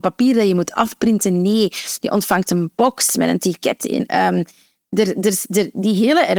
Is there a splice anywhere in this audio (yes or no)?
yes